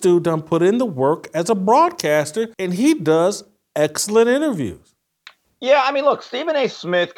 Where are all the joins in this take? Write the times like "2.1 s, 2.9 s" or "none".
2.5 s